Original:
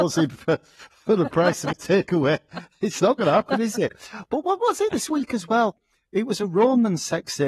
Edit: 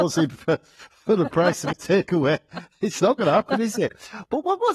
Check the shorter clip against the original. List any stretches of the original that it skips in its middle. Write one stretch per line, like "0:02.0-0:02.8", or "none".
none